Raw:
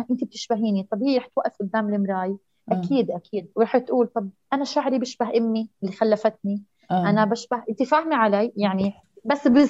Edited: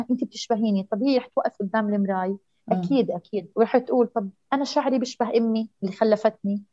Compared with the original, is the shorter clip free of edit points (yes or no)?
yes